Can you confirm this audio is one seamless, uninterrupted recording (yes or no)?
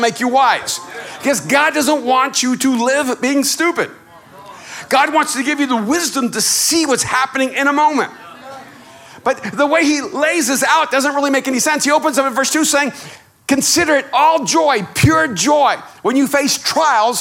yes